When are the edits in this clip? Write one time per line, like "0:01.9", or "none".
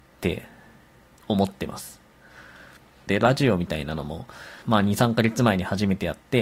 0:03.1
0:04.6